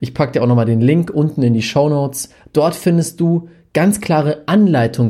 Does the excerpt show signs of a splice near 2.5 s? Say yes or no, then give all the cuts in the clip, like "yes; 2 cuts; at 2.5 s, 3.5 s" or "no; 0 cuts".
no; 0 cuts